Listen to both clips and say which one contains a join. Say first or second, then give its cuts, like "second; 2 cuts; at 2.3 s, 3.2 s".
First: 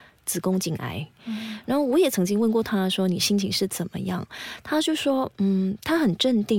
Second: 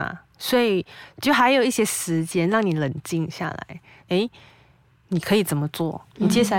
second; 2 cuts; at 1.1 s, 4.0 s